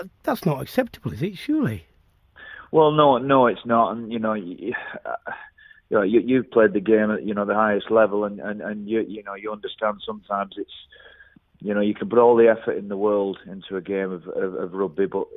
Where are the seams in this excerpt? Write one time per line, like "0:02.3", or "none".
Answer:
none